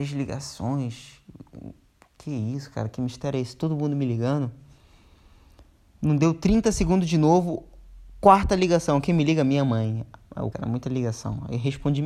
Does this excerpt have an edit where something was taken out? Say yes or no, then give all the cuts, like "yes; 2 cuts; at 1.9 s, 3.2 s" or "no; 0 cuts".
yes; 1 cut; at 10.5 s